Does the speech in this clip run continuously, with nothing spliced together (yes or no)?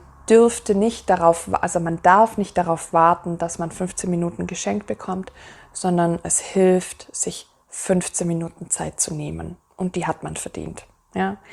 yes